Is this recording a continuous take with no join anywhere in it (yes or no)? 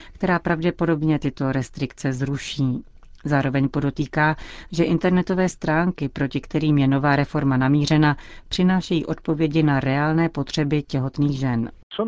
yes